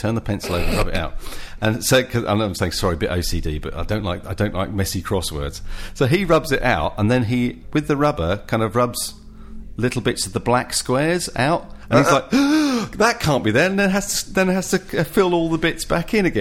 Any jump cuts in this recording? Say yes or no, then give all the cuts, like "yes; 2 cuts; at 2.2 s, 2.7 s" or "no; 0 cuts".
no; 0 cuts